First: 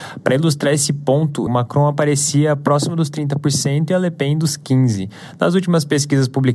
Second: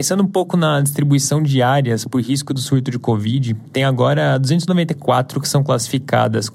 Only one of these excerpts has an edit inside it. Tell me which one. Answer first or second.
first